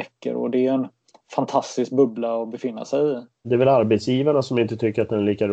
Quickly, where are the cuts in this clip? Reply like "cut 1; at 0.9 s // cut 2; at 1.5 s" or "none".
cut 1; at 3.4 s

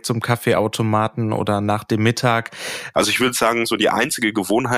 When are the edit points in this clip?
cut 1; at 2.9 s

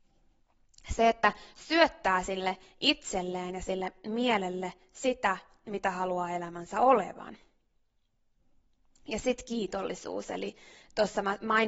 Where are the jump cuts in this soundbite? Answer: none

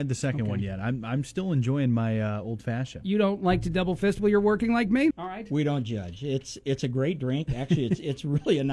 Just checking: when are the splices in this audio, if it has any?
cut 1; at 5.1 s

